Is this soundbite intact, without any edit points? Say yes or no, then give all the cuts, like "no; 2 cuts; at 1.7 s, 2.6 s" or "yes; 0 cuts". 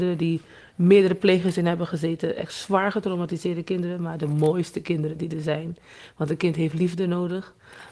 yes; 0 cuts